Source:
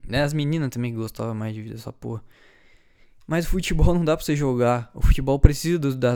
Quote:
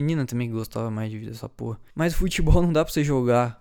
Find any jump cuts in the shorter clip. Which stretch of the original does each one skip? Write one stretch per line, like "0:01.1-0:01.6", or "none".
0:02.3-0:03.2